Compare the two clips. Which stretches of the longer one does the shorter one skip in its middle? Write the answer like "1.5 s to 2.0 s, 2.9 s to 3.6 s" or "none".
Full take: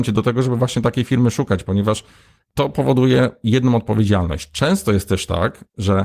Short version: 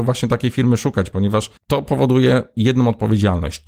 2.1 s to 2.4 s

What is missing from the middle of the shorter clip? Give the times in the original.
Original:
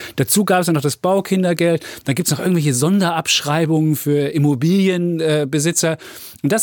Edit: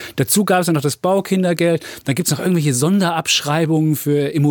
none

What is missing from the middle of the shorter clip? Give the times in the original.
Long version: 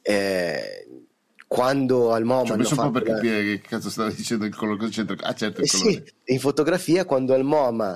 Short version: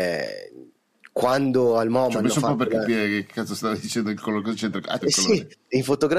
5.4 s to 5.6 s

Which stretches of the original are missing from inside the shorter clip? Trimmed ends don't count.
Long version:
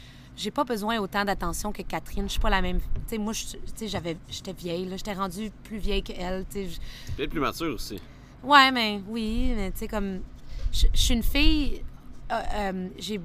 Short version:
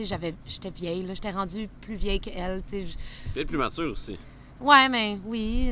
none

